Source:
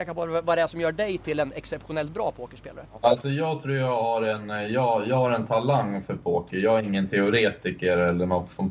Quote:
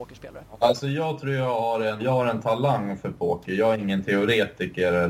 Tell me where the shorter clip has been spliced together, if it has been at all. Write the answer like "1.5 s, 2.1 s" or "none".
2.0 s